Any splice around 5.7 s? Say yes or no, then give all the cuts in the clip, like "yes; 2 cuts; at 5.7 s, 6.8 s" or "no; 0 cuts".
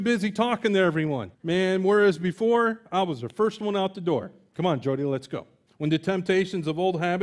yes; 2 cuts; at 1.3 s, 5.7 s